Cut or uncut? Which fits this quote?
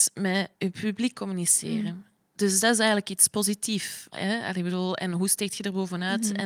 cut